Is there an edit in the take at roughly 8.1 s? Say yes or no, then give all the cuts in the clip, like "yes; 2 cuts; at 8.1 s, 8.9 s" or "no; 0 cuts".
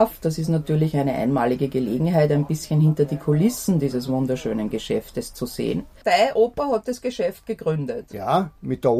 no; 0 cuts